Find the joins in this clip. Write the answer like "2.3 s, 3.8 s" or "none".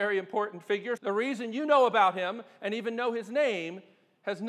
1.0 s

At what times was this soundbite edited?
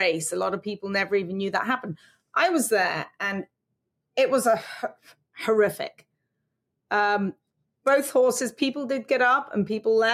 none

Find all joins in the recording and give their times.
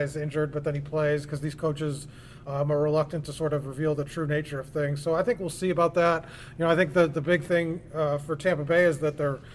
none

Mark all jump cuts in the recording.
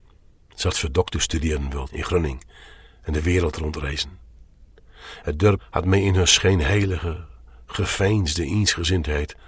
1.9 s, 5.2 s

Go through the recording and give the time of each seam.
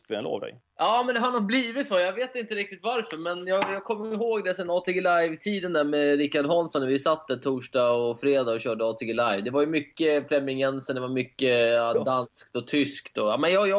none

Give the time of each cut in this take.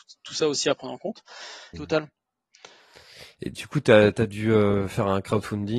1.7 s

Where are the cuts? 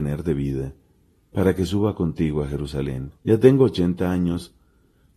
3.2 s

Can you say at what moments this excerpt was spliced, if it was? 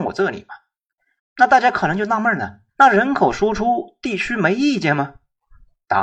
1.2 s, 2.7 s

